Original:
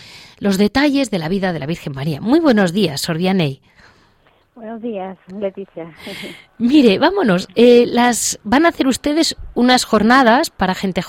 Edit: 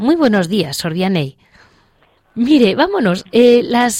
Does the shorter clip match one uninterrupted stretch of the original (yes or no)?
no